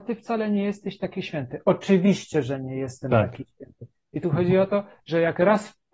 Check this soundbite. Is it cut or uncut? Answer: uncut